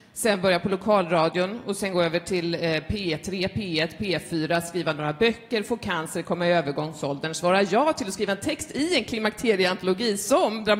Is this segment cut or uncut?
uncut